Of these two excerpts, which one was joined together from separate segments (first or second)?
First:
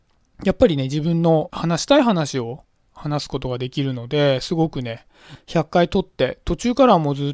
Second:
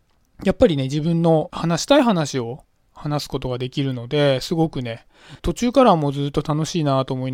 second